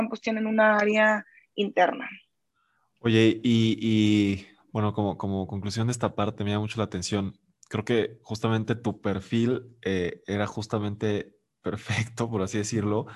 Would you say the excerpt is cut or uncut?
uncut